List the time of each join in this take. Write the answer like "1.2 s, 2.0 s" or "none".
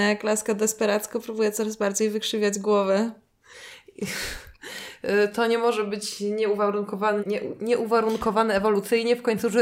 7.2 s